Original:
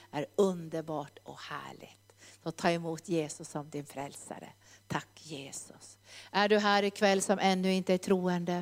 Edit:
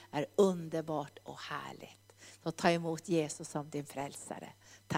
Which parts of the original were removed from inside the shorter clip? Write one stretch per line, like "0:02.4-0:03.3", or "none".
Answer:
none